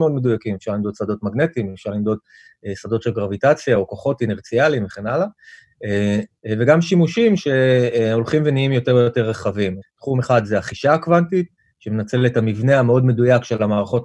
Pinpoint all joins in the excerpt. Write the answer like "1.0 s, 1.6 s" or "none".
6.4 s, 9.8 s